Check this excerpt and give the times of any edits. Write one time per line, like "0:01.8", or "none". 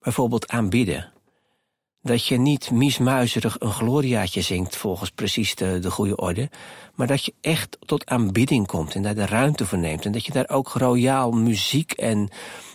none